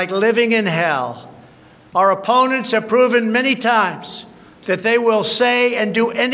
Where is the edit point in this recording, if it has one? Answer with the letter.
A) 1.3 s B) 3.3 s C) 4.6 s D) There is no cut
C